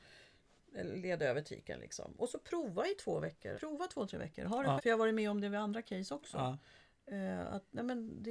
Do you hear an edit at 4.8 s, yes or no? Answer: yes